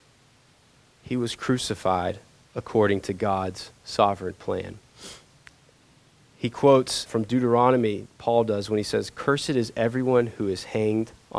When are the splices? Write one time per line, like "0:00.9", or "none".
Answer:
0:07.1

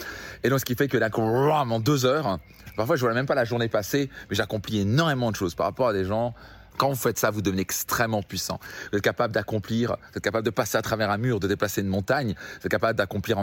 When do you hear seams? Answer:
0:06.7

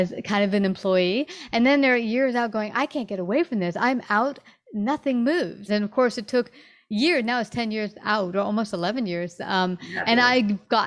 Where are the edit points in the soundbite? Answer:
0:05.7

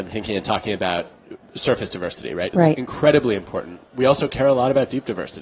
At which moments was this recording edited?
0:02.5

